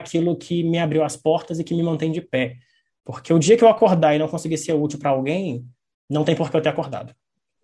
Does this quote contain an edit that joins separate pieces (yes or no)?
no